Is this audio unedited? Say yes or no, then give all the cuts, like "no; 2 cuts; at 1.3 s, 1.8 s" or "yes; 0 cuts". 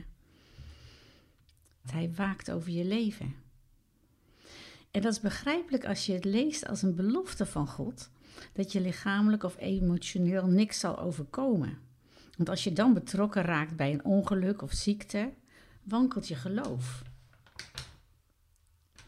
no; 1 cut; at 1.8 s